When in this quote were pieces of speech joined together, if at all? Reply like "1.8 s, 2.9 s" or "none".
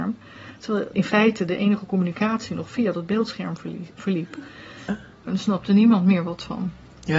0.9 s, 4.9 s